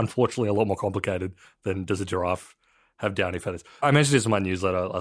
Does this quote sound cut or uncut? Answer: uncut